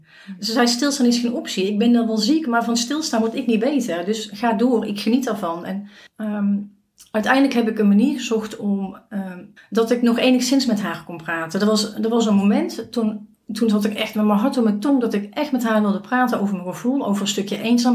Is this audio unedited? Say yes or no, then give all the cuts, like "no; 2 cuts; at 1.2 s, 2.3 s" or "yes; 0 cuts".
no; 1 cut; at 9.6 s